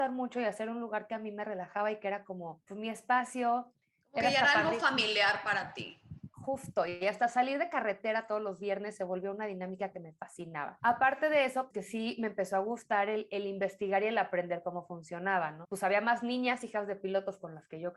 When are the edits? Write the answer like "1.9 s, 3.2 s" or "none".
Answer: 11.7 s